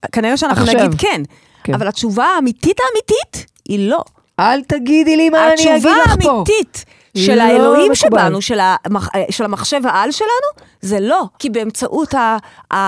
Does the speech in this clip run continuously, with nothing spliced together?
no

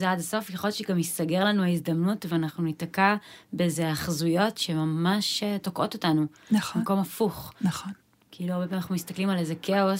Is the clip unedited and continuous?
yes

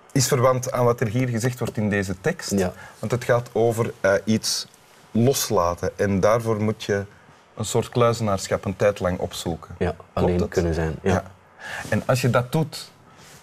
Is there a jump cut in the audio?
no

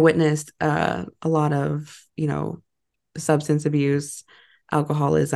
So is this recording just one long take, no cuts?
yes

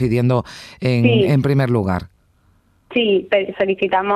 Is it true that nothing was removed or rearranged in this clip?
yes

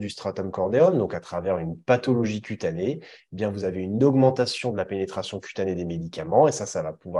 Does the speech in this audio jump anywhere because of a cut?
no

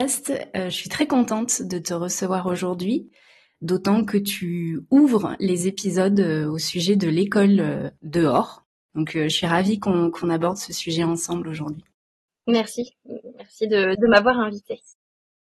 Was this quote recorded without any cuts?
yes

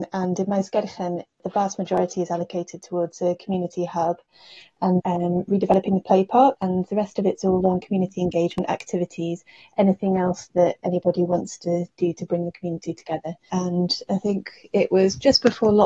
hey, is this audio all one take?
no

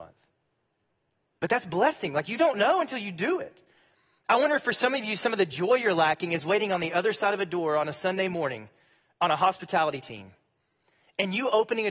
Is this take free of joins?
no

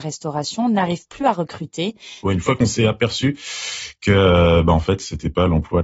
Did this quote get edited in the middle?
yes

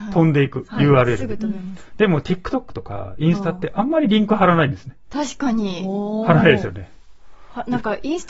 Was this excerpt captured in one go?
yes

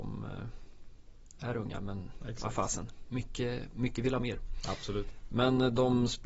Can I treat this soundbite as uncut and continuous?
yes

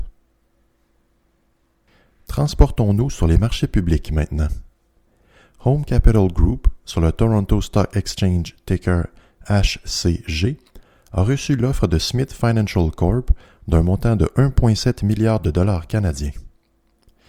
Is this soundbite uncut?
yes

